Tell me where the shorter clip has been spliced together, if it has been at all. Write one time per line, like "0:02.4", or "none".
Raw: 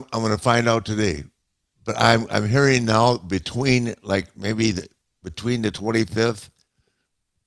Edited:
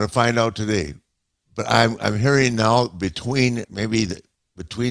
0:03.7